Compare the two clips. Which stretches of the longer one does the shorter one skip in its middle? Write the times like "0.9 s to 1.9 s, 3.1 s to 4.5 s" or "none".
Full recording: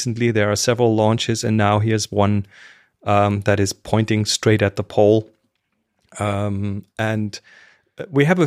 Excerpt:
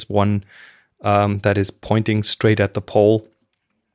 none